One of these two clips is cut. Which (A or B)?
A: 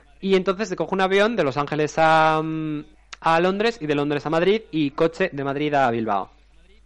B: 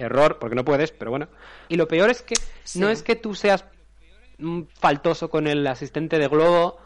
B